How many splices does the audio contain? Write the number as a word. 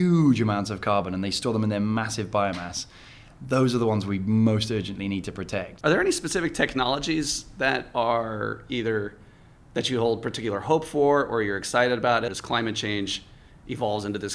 one